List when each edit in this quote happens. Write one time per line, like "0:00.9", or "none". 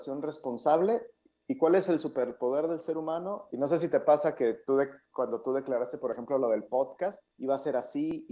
0:03.5
0:07.3